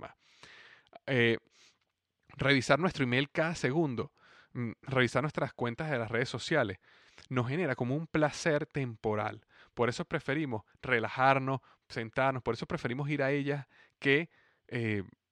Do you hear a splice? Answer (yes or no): no